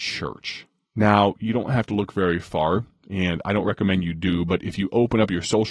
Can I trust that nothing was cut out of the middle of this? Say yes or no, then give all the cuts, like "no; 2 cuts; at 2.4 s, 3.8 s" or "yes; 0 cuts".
yes; 0 cuts